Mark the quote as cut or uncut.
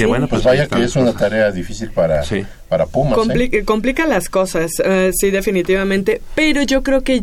uncut